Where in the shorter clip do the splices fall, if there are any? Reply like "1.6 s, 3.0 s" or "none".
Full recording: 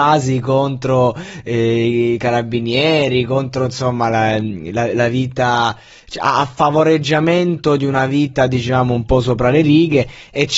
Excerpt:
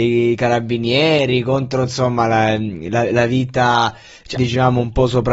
4.4 s

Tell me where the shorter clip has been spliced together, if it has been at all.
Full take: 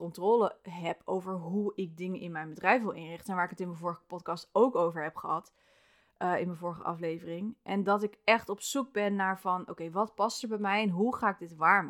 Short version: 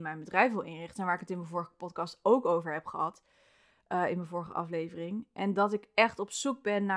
none

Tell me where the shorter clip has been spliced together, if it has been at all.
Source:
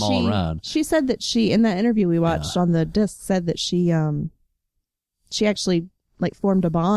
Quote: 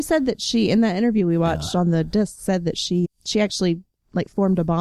3.0 s

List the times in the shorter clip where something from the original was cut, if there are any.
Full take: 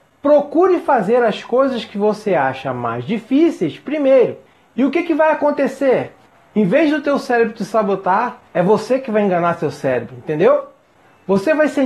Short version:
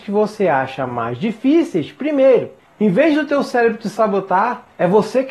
2.7 s

